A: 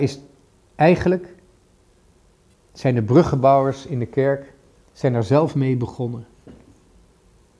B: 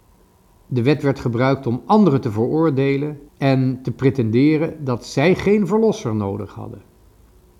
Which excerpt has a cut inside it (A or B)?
B